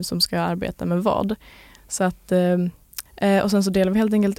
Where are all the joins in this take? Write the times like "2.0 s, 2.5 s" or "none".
3.1 s